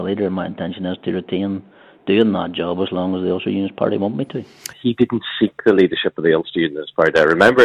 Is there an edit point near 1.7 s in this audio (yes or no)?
no